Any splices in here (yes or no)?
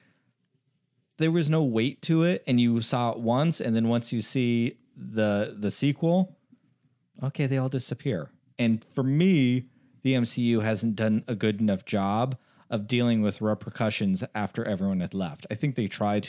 no